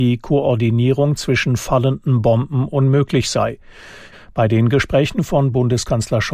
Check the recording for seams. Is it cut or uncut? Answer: cut